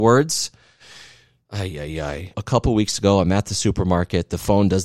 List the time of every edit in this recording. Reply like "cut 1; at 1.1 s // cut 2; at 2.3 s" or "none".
cut 1; at 2.3 s